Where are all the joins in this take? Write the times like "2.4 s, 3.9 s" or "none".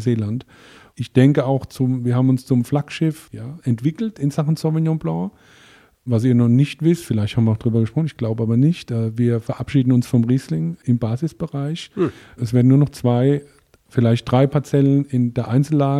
none

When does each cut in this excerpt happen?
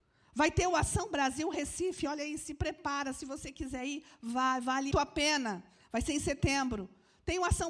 4.9 s

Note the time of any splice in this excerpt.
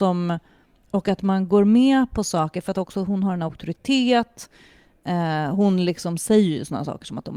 none

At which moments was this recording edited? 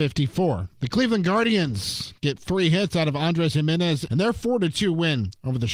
4.1 s

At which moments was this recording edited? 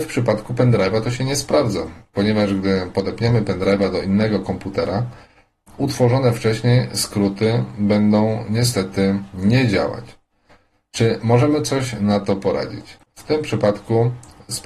13.0 s

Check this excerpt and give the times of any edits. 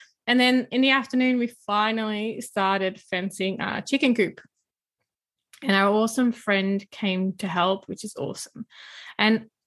7.9 s

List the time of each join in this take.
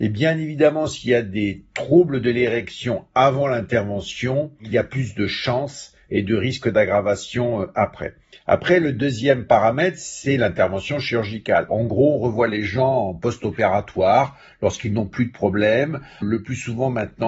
11.7 s, 16.2 s

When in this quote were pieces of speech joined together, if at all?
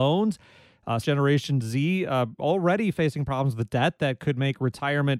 1.0 s

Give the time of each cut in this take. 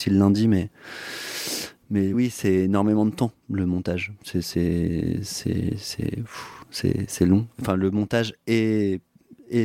2.1 s, 8.4 s

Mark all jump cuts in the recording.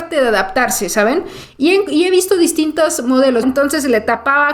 3.4 s

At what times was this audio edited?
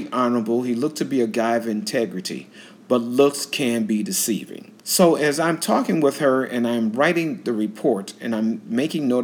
4.8 s

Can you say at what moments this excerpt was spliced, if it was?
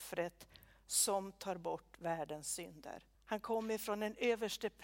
3.1 s

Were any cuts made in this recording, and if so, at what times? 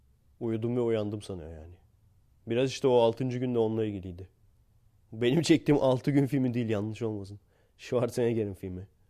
none

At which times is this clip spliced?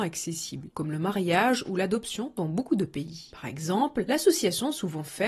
3.3 s

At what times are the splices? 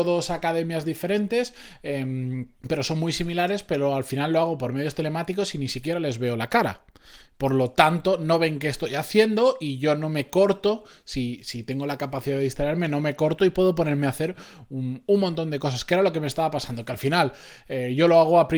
2.6 s

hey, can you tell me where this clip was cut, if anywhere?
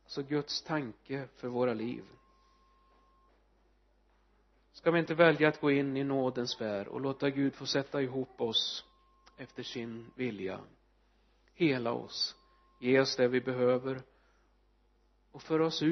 none

